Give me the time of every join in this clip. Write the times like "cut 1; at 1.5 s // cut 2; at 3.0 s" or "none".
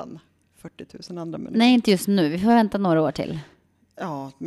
none